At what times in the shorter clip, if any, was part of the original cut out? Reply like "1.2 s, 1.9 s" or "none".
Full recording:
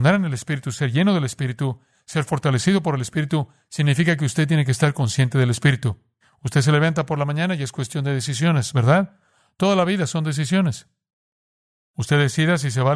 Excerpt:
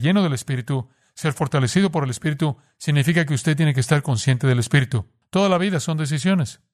5.2 s